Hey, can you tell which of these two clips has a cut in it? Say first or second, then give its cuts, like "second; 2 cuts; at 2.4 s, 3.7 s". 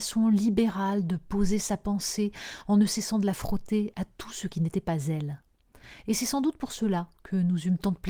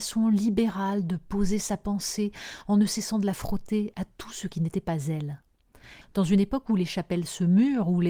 second; 1 cut; at 6.0 s